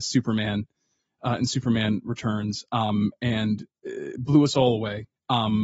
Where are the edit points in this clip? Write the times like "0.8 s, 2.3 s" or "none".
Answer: none